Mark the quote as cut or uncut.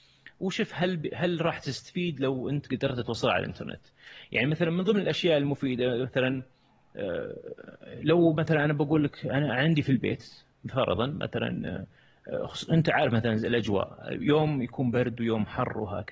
uncut